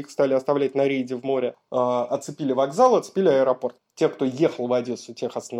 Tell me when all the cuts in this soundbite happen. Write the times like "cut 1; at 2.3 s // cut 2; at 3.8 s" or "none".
cut 1; at 3.8 s